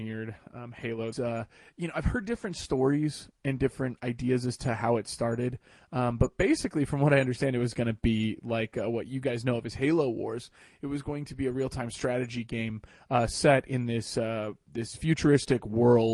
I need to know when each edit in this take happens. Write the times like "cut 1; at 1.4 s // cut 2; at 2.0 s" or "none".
cut 1; at 1.1 s